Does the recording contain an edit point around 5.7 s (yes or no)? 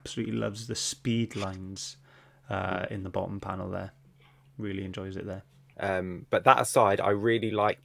yes